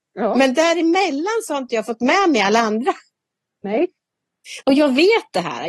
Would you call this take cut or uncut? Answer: cut